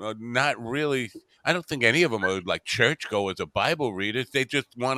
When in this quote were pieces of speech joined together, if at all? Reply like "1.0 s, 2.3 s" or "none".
none